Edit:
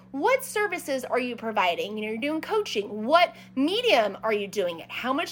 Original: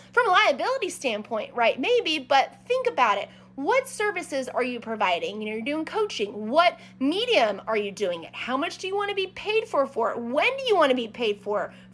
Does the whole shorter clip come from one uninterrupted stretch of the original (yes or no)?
yes